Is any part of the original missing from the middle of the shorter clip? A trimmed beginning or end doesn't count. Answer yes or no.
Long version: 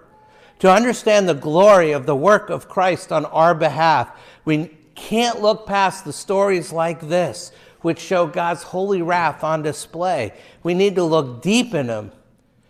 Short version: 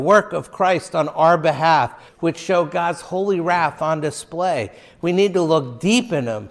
yes